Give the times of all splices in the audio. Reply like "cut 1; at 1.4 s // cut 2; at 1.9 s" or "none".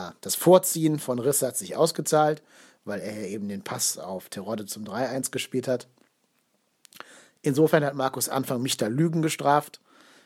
none